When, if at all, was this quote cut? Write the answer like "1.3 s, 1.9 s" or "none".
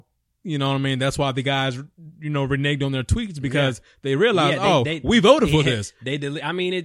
none